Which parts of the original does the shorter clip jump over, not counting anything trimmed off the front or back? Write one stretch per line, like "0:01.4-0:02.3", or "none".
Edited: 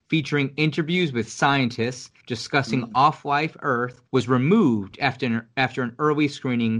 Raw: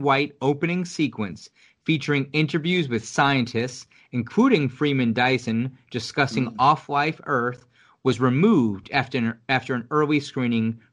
0:04.0-0:05.8
0:07.7-0:08.0